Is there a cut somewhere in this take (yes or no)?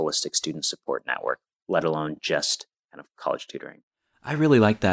no